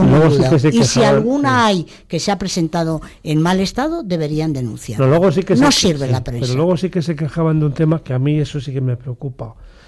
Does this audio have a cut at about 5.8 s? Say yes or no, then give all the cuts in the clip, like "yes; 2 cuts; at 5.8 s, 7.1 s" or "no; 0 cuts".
no; 0 cuts